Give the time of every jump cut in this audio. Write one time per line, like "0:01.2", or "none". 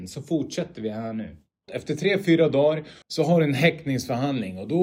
0:01.7
0:03.0